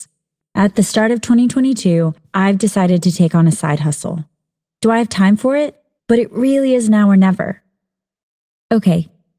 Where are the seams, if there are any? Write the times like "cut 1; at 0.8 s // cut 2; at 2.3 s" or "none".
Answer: cut 1; at 6.0 s